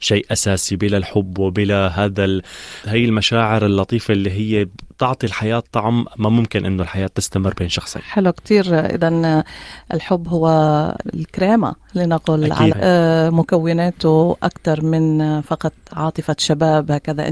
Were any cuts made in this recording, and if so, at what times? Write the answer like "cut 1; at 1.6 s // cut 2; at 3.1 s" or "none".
cut 1; at 12.7 s